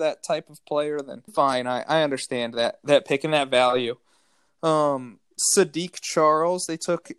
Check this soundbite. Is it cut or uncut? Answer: cut